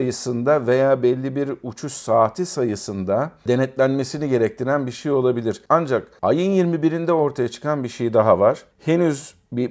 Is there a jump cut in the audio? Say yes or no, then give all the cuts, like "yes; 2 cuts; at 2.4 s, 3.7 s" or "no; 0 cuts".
yes; 1 cut; at 5.7 s